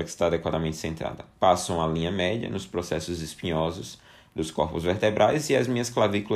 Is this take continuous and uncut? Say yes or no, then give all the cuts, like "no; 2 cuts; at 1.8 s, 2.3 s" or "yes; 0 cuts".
yes; 0 cuts